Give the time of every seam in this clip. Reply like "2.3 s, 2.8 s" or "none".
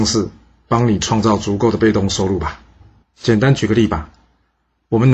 3.0 s